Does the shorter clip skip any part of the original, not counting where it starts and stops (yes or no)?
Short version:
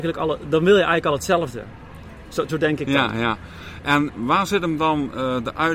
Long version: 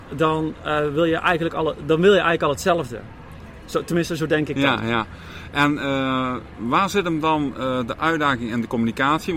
yes